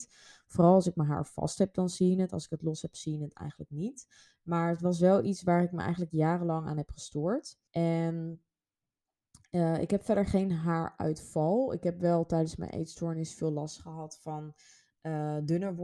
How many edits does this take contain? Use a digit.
1